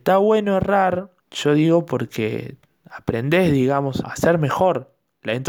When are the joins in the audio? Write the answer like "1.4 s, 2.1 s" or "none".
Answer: 1.2 s, 4.0 s